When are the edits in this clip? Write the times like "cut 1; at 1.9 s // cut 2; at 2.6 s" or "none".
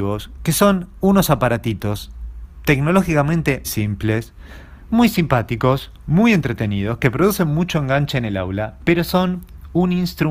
cut 1; at 3.6 s